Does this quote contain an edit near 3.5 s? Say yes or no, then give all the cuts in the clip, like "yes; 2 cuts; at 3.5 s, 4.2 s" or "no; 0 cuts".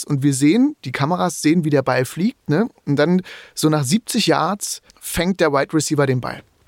no; 1 cut; at 4.9 s